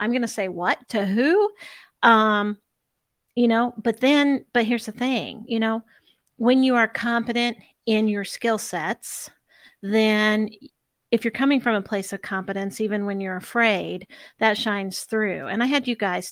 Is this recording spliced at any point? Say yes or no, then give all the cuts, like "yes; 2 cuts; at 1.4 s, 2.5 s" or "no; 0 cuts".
no; 0 cuts